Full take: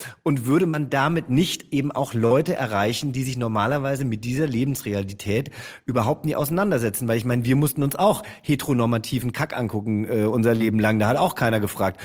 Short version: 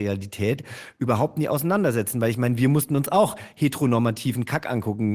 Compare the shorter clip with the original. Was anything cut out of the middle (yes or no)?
no